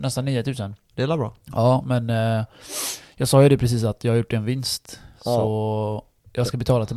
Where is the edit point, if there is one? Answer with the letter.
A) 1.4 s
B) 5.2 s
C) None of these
C